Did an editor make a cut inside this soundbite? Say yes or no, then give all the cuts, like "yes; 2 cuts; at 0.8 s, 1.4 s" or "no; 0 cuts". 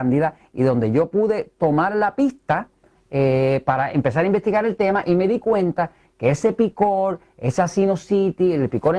yes; 1 cut; at 3.9 s